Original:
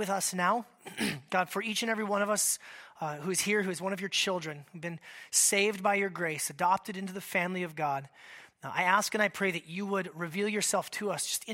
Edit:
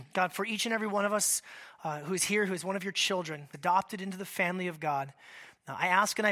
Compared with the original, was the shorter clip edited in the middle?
yes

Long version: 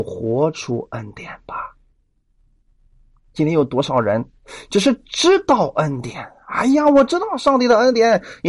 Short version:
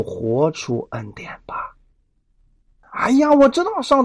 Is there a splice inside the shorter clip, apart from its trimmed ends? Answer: yes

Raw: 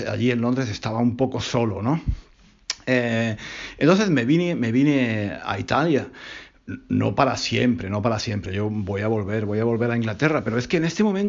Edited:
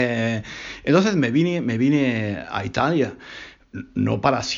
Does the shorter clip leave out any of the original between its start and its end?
no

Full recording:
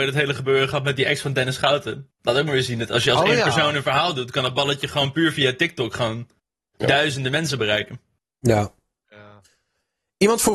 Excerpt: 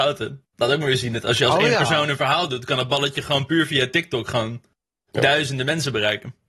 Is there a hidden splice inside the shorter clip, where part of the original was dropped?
no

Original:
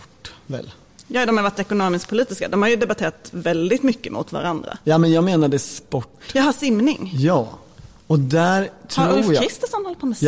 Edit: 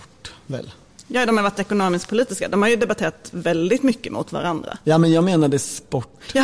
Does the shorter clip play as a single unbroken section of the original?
yes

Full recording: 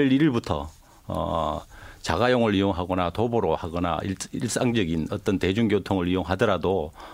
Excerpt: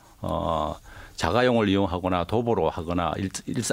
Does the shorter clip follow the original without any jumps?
yes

